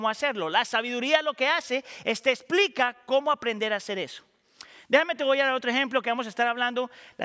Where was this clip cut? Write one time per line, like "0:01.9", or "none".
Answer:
none